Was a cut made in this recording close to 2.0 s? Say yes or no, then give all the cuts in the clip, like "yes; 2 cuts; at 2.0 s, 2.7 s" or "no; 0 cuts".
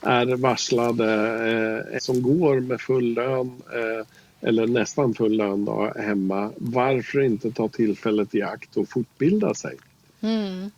yes; 1 cut; at 2.0 s